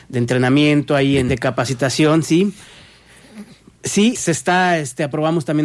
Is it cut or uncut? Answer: cut